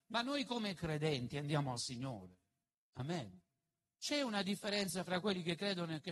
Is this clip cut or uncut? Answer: cut